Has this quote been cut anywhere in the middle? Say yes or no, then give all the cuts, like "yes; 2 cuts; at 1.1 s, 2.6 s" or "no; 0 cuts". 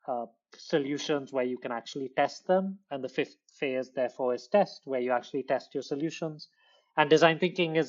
no; 0 cuts